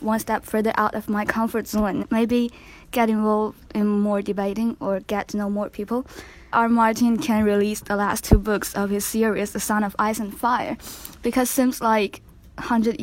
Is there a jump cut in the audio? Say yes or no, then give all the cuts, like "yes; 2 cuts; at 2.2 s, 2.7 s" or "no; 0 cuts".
yes; 2 cuts; at 2.0 s, 6.5 s